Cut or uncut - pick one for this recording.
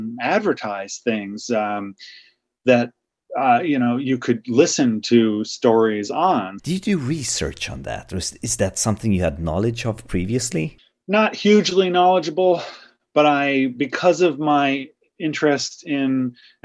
cut